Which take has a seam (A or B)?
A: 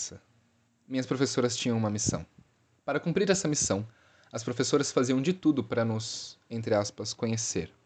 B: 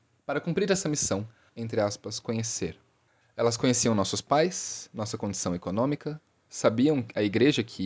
B